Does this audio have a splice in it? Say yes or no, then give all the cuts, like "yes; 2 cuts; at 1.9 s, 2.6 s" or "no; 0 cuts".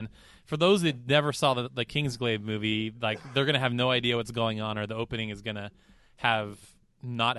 no; 0 cuts